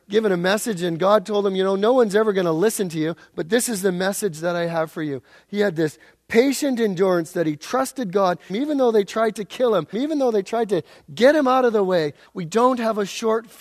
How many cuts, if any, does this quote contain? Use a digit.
3